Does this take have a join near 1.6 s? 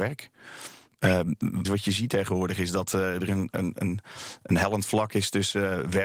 yes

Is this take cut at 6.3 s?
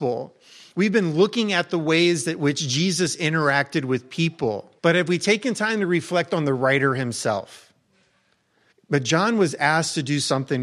no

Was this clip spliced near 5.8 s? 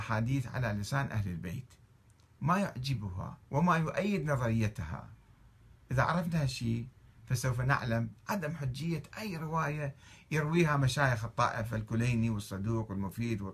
no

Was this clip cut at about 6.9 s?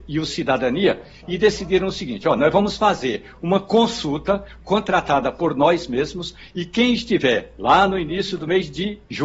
no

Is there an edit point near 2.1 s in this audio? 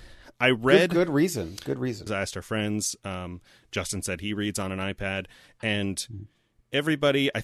yes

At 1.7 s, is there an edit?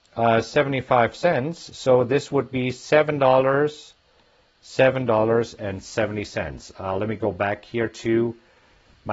no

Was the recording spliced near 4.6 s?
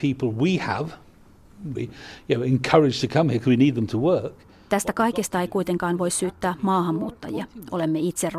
no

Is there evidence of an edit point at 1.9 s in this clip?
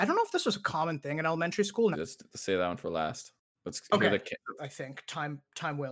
yes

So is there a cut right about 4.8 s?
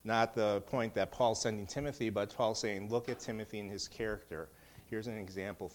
no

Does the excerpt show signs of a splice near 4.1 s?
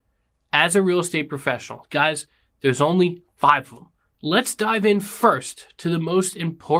yes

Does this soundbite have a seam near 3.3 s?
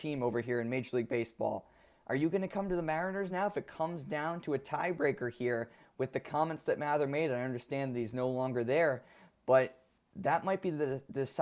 no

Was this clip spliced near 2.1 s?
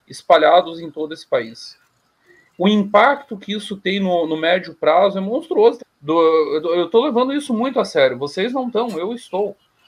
no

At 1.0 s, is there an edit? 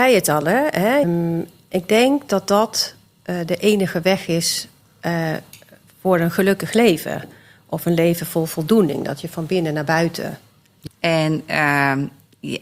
yes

